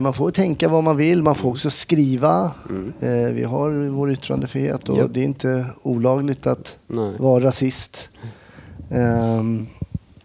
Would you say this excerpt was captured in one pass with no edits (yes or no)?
yes